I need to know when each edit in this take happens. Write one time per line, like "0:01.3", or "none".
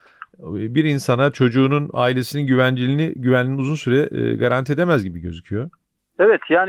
none